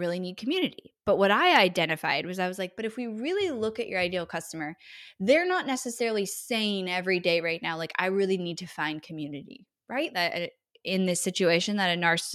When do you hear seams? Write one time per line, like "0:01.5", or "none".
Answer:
0:10.1